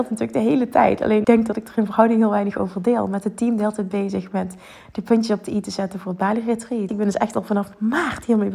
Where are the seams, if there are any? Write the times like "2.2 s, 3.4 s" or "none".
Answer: 1.2 s, 6.9 s